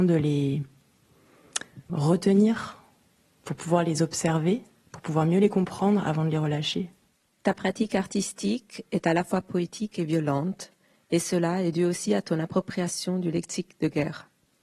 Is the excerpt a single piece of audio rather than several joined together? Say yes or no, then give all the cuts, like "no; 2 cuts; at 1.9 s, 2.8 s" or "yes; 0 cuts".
no; 1 cut; at 1.9 s